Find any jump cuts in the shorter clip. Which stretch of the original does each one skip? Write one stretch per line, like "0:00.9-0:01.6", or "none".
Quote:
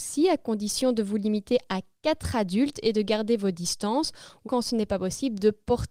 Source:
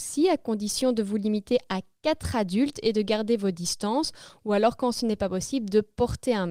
0:04.5-0:04.8